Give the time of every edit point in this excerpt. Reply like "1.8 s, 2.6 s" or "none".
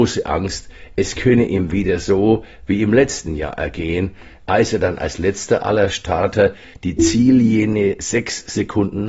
none